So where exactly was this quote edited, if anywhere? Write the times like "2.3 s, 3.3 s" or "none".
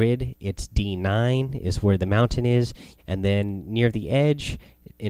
3.0 s